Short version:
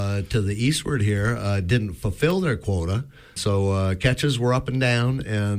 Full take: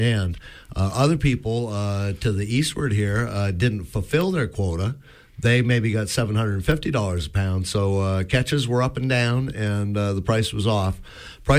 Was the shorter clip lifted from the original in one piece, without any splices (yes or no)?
no